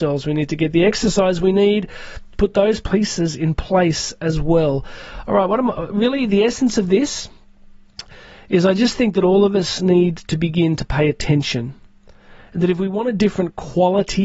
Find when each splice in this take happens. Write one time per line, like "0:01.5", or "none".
0:02.8